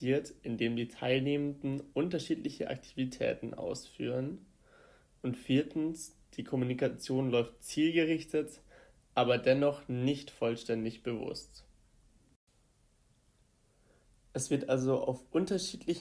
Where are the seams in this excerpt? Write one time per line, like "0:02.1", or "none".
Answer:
none